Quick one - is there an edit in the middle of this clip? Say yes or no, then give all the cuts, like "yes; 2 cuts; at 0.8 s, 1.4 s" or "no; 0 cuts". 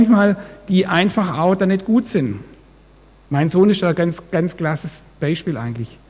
yes; 1 cut; at 3.3 s